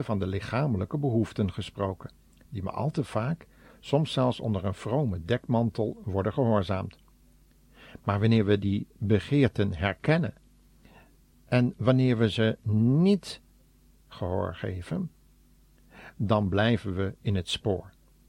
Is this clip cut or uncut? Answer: uncut